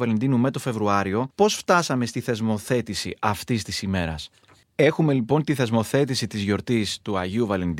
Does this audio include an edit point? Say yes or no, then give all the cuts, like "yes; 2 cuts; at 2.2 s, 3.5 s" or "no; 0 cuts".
yes; 2 cuts; at 1.3 s, 4.6 s